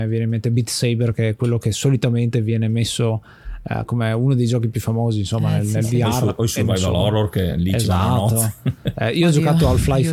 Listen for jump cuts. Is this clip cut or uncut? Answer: uncut